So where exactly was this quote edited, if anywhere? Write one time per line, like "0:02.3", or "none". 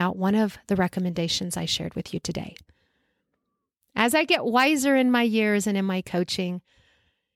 none